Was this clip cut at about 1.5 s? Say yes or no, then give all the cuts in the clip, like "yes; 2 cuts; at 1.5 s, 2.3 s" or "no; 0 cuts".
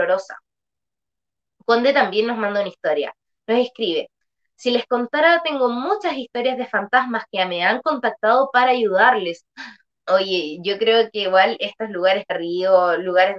no; 2 cuts; at 9.9 s, 12.3 s